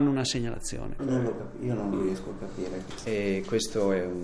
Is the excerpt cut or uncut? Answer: cut